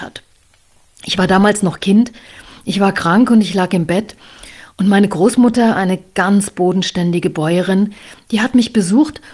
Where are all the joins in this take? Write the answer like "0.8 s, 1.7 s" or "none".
none

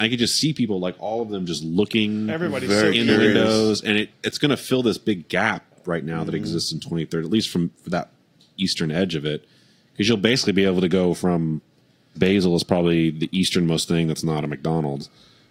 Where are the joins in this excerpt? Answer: 4.1 s, 12.2 s

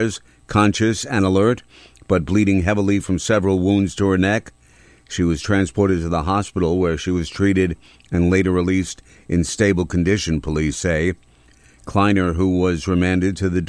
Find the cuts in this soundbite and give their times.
none

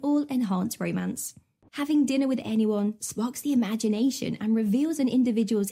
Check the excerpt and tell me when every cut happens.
1.7 s, 3.0 s

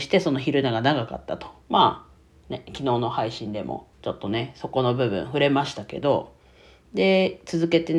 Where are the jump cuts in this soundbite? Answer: 1.7 s, 3.9 s

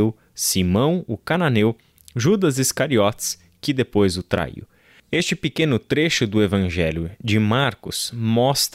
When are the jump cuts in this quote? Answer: none

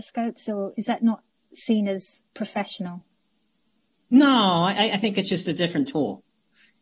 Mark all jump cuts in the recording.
none

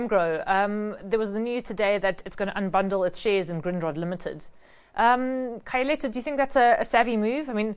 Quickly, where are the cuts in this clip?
none

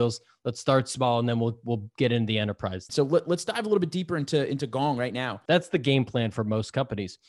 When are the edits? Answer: 2.9 s, 5.5 s

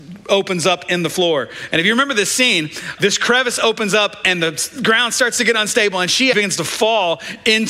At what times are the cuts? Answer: 3.0 s, 6.3 s

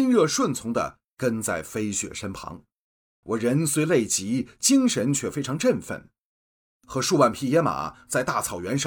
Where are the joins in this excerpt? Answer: 3.2 s

